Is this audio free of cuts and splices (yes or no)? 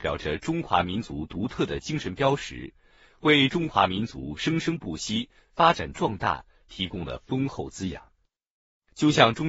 yes